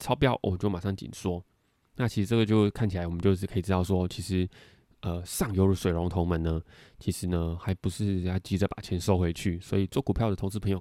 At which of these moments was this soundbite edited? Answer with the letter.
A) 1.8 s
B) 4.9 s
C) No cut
A